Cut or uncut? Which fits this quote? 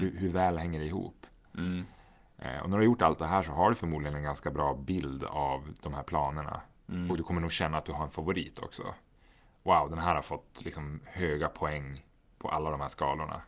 uncut